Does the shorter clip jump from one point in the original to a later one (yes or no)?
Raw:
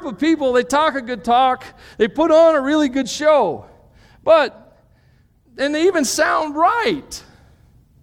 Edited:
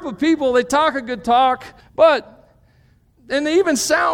yes